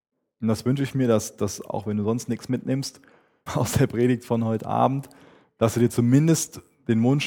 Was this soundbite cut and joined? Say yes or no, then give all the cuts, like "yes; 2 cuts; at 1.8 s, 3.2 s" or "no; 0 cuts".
yes; 1 cut; at 3.5 s